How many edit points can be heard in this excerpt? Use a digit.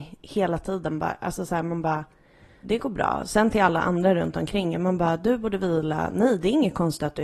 1